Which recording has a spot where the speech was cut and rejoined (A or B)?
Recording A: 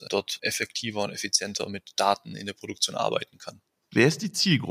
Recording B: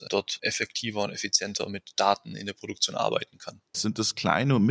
B